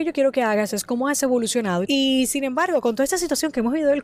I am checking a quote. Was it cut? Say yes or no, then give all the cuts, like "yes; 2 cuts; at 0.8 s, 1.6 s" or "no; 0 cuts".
yes; 1 cut; at 1.8 s